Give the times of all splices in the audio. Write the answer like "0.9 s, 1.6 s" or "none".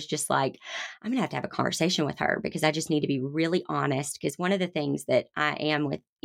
none